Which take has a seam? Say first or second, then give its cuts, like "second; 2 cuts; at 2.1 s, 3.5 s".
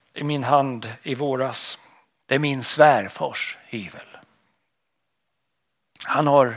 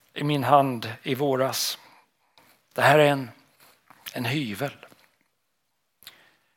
first; 1 cut; at 2.2 s